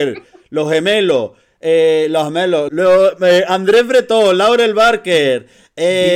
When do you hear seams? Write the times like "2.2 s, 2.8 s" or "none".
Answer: 2.7 s